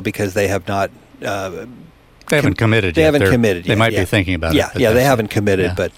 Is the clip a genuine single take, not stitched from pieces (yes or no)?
yes